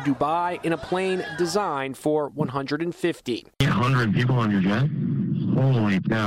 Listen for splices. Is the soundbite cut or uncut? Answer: uncut